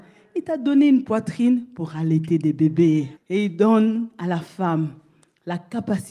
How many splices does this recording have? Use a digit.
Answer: 1